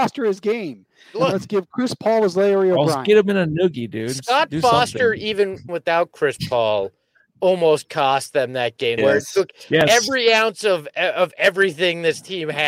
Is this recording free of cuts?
no; 2 cuts; at 5.7 s, 9.0 s

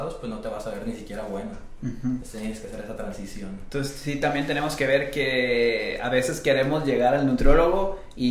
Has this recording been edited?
no; 0 cuts

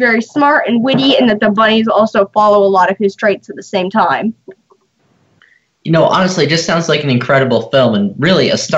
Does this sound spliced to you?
no; 0 cuts

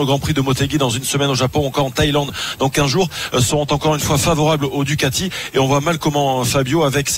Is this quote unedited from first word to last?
yes; 0 cuts

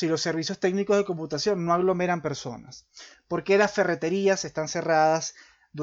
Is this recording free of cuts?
yes; 0 cuts

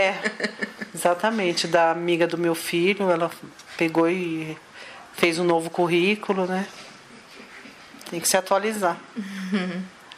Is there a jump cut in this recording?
yes; 1 cut; at 8.0 s

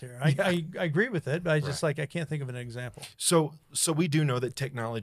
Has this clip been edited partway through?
no; 0 cuts

